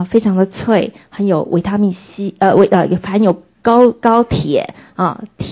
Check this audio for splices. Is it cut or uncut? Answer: uncut